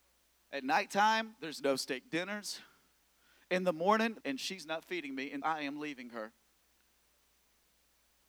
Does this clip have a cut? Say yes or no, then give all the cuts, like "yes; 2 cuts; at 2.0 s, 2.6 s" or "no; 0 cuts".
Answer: yes; 2 cuts; at 4.2 s, 5.4 s